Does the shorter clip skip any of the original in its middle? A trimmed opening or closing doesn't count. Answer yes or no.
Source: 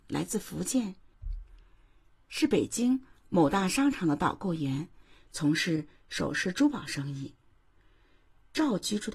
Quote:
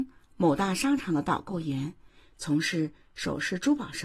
no